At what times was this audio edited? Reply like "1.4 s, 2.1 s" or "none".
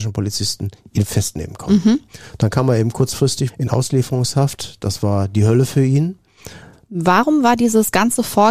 6.8 s